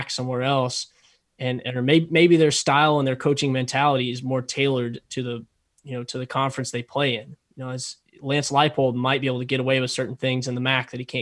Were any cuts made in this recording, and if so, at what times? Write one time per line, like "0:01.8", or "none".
none